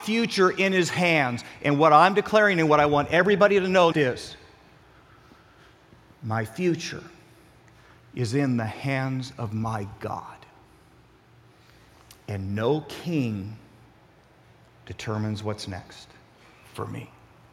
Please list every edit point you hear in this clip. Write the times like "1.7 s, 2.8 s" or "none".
3.9 s